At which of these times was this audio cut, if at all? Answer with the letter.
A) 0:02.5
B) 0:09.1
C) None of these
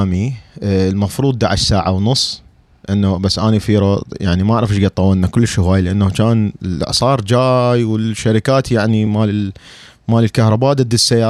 C